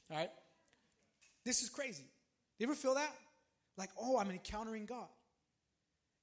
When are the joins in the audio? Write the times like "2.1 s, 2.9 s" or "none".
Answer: 2.4 s